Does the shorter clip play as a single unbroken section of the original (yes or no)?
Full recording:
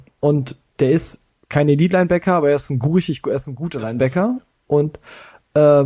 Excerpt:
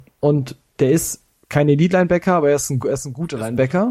no